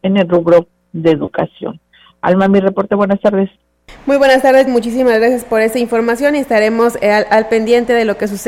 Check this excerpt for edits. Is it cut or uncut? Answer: cut